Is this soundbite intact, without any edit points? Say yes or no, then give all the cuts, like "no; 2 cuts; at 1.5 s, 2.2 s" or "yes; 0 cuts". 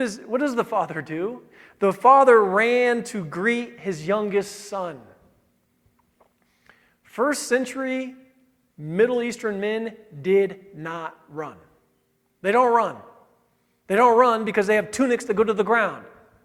yes; 0 cuts